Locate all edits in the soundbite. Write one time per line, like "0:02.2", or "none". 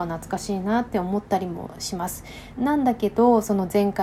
0:02.5